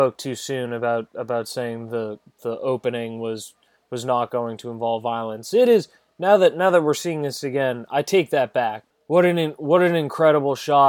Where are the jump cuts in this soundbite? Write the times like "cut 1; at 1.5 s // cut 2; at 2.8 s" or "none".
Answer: cut 1; at 8.9 s